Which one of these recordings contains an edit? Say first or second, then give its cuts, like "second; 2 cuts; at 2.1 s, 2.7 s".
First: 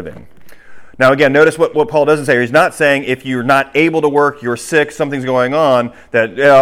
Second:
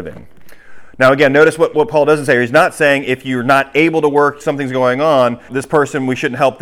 second; 2 cuts; at 4.4 s, 5.5 s